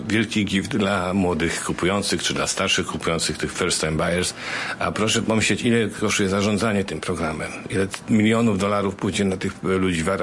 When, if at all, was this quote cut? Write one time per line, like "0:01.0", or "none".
none

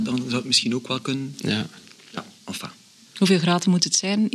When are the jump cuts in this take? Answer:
0:03.1

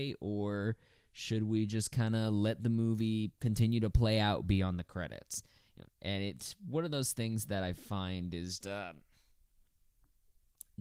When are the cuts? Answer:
0:05.9
0:08.6

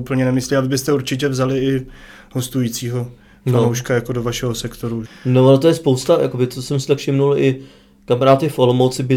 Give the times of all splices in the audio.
0:05.1

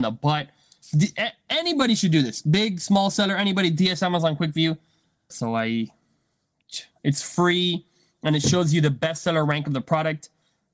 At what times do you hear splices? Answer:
0:05.3
0:07.0

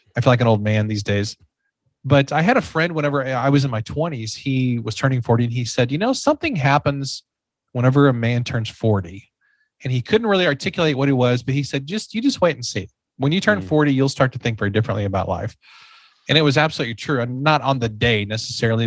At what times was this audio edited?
none

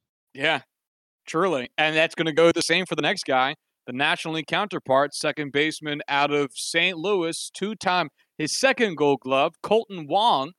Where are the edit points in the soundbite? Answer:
none

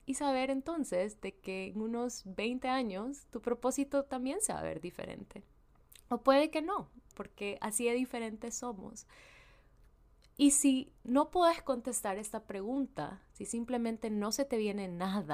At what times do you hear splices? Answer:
0:07.1

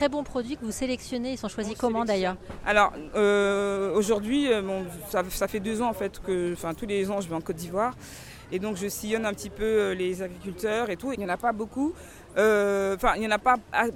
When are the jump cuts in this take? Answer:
0:11.1

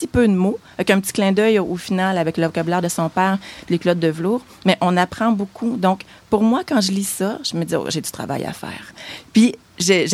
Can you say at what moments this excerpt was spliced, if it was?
none

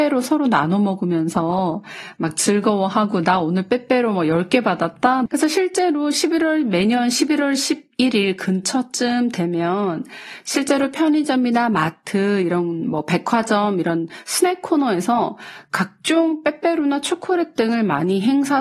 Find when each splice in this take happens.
0:05.3

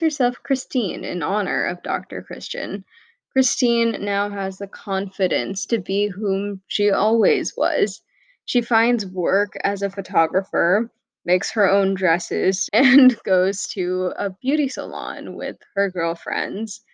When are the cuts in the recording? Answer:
0:12.7

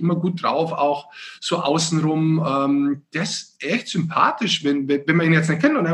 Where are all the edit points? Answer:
none

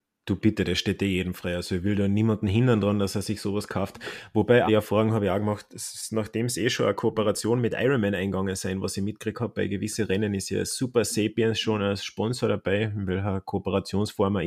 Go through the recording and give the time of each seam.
0:04.7

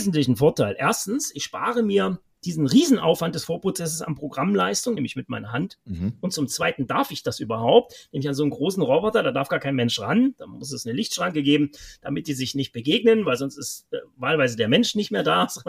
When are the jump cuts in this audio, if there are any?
0:05.0

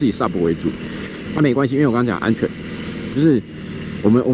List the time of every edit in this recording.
0:01.2
0:03.1

